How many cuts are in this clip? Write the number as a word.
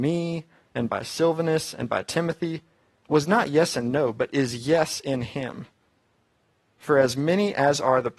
zero